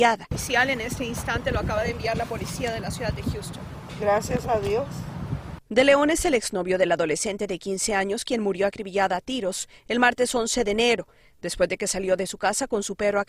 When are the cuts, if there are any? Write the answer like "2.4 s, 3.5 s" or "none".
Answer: 5.6 s